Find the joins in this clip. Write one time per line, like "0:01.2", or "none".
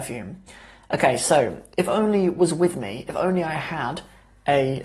none